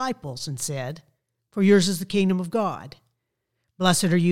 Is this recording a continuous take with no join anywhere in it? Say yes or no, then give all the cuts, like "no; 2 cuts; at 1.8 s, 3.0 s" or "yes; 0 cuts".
no; 1 cut; at 1.4 s